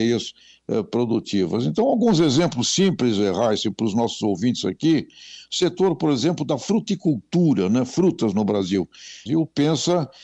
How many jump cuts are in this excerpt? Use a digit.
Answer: 1